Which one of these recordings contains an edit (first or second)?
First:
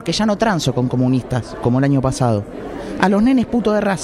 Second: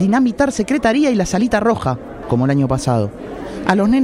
second